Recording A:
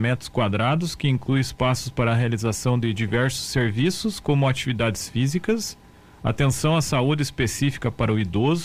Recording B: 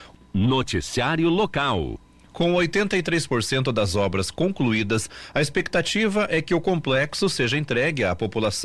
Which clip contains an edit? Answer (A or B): B